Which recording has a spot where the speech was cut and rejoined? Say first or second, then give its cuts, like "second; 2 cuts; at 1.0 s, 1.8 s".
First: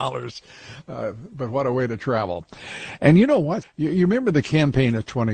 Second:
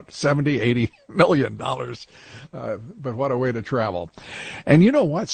first; 1 cut; at 3.6 s